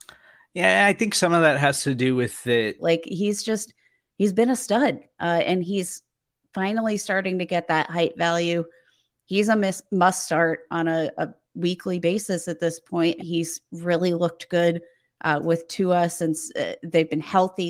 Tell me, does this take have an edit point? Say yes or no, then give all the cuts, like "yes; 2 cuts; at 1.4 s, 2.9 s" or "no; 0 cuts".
yes; 2 cuts; at 2.8 s, 13.2 s